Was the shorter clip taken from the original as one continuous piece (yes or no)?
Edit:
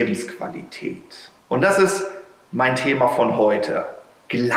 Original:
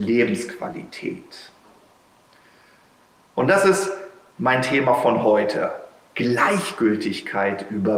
no